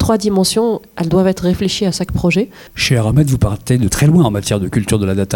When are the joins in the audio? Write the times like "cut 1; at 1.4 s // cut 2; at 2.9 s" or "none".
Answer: cut 1; at 2.7 s // cut 2; at 3.9 s